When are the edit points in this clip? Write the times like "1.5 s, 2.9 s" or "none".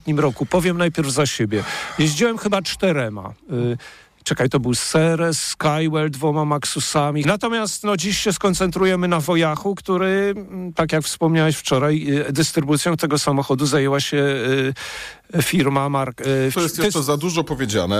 7.2 s, 16.5 s